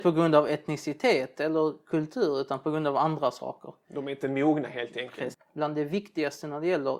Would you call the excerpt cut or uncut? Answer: cut